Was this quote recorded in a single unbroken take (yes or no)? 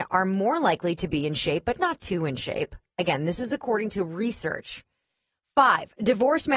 yes